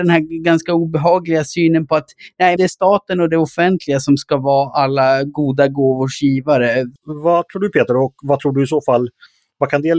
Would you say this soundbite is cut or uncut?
cut